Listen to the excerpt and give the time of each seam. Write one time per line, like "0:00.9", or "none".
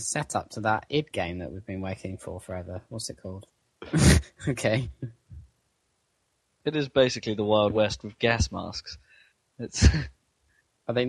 0:03.5